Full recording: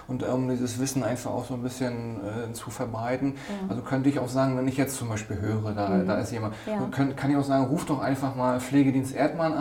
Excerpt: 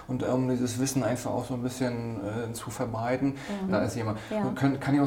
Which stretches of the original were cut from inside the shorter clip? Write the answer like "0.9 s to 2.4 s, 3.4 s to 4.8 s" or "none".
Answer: 3.7 s to 6.0 s